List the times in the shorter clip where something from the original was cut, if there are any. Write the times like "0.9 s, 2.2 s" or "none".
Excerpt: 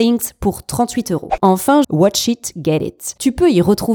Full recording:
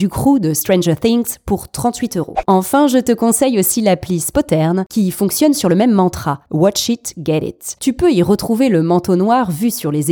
1.8 s